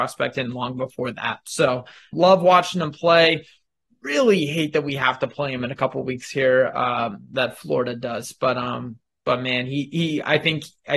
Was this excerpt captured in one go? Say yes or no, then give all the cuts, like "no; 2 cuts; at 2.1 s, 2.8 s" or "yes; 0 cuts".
no; 1 cut; at 2.1 s